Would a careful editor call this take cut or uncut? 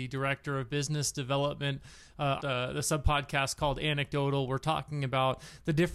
cut